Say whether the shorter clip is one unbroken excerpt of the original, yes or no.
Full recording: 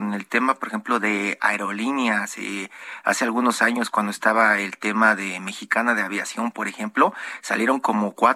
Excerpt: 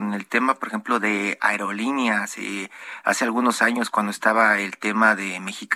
yes